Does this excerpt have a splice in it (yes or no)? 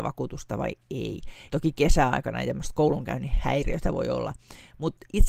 yes